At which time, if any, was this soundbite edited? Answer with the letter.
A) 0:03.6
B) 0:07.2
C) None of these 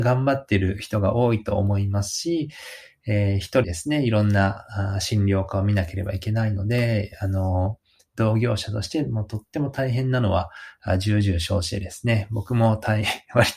A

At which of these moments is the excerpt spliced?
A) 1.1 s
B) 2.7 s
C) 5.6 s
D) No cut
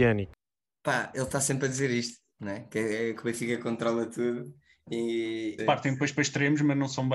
C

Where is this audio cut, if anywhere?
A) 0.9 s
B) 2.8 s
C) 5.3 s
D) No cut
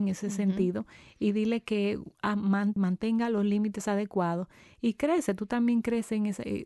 B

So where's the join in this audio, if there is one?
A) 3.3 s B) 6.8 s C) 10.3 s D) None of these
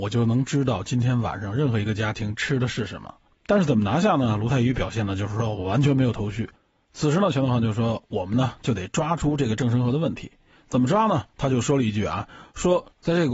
A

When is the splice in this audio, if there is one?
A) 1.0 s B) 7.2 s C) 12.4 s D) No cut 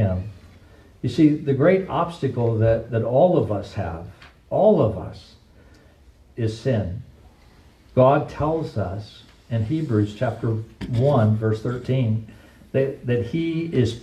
D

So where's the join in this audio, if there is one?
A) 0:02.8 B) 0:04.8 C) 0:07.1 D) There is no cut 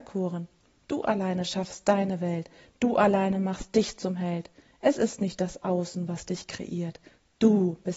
D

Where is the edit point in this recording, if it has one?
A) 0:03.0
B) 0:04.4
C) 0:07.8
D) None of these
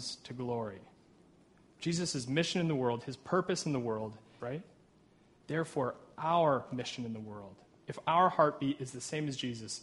B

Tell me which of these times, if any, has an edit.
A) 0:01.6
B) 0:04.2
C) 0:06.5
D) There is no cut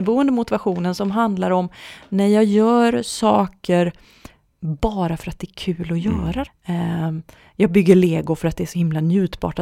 C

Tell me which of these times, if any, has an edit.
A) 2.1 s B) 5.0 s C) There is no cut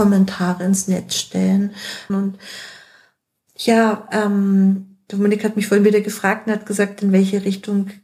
A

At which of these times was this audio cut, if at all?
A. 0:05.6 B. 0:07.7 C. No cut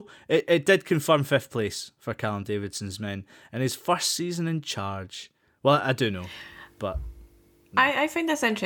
A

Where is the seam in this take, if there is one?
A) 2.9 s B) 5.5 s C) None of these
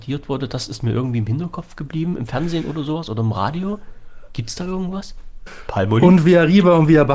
B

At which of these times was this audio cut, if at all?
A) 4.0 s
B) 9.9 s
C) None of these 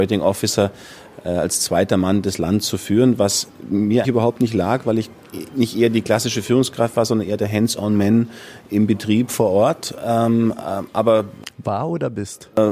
A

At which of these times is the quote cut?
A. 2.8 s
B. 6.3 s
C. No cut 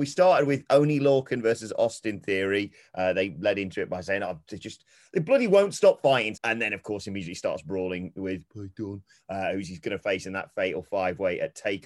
B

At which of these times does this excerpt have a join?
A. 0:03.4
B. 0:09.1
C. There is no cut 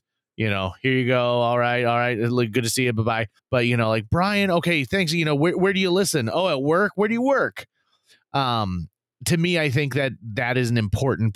A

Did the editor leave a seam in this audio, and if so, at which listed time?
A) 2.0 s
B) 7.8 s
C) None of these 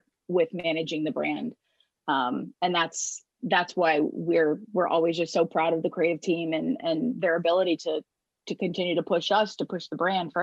C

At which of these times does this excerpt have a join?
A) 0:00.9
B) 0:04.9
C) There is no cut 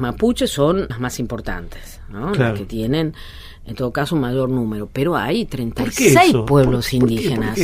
A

